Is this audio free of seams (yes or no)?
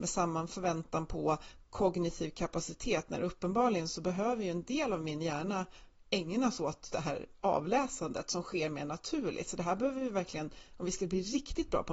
no